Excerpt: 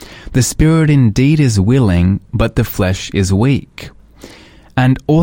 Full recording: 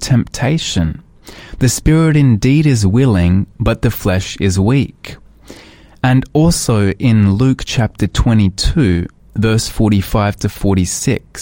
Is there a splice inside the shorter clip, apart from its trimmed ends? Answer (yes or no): no